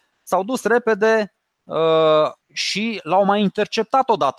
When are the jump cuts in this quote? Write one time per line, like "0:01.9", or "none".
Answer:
0:02.4